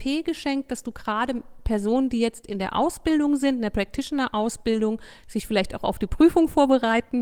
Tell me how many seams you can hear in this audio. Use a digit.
0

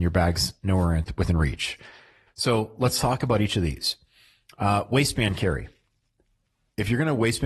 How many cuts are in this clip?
1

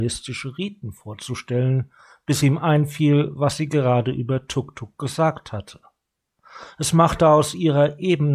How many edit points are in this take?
0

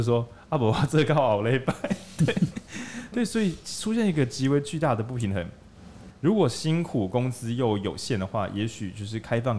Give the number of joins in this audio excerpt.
1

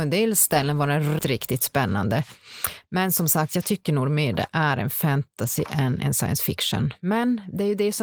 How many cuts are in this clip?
1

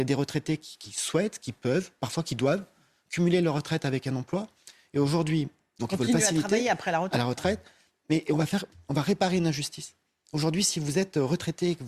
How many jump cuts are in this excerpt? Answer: 1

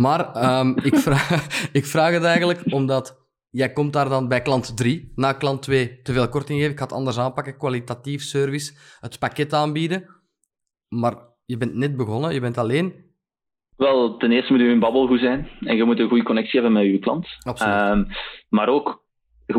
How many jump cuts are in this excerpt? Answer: 1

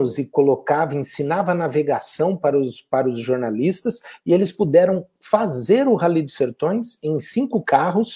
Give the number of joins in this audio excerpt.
0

